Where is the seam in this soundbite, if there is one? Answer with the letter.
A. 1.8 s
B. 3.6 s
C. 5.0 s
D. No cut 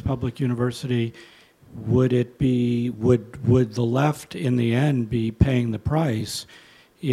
D